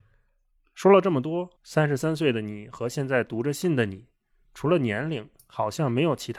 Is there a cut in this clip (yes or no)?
yes